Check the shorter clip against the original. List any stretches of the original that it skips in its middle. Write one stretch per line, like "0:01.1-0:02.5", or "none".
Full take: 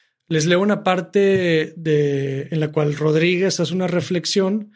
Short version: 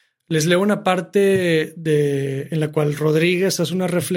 none